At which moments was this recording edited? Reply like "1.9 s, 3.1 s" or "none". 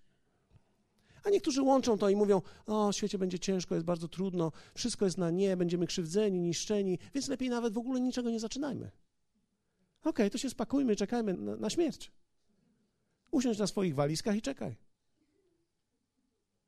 11.3 s